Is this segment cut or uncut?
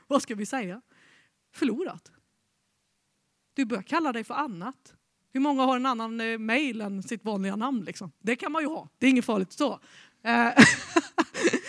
uncut